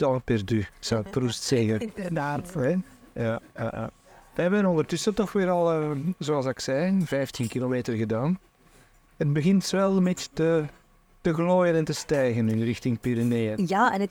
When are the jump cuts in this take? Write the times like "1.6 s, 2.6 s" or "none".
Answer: none